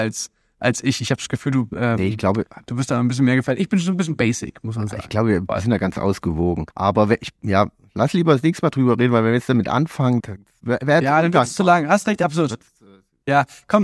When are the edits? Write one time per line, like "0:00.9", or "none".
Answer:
0:06.7
0:10.2